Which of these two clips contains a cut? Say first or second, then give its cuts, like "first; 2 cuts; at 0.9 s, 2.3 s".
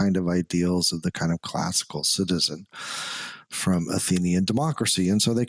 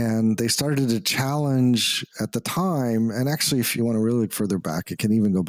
second; 1 cut; at 3.8 s